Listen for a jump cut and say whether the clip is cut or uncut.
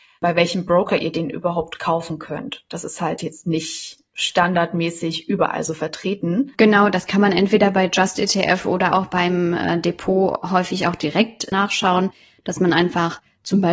uncut